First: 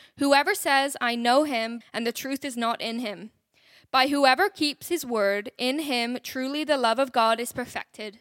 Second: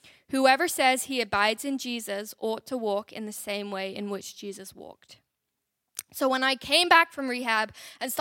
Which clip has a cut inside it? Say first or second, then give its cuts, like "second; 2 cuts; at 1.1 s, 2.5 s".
first; 1 cut; at 1.8 s